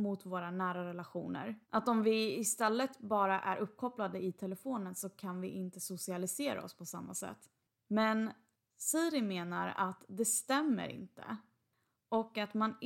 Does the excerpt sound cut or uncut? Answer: cut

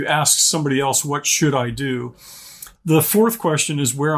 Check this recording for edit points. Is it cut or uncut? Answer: cut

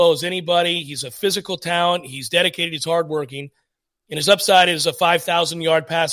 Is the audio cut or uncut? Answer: uncut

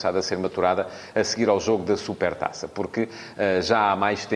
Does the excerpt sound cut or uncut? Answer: uncut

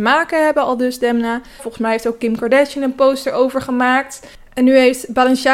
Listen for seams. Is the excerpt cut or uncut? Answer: cut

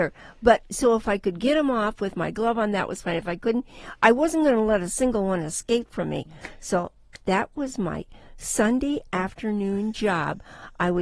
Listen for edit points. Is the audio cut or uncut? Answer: uncut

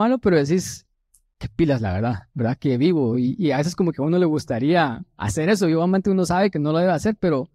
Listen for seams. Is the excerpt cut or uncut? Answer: uncut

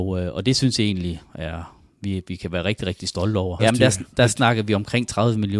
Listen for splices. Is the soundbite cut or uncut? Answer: cut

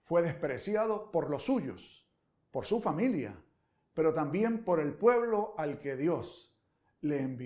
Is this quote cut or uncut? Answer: uncut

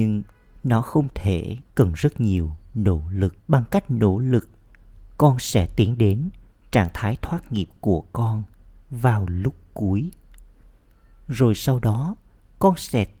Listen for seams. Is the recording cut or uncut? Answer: cut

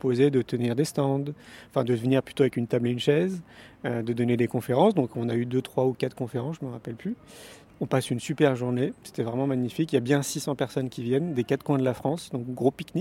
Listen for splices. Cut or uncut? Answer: uncut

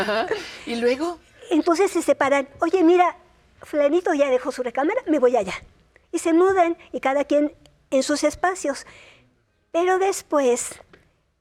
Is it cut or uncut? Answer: uncut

